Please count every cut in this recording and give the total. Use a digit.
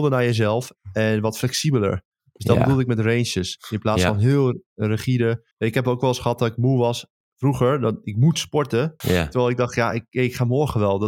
2